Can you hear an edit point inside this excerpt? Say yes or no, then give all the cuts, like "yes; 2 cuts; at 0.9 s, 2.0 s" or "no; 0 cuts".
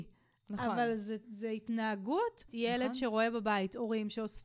yes; 2 cuts; at 1.2 s, 2.5 s